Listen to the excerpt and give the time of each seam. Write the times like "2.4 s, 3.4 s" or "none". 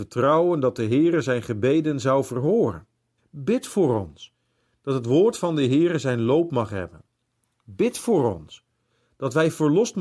3.2 s